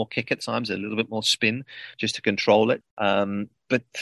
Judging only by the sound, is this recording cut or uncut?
cut